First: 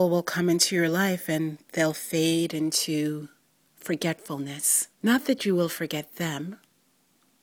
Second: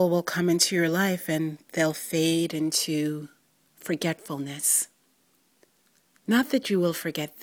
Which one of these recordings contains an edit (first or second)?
first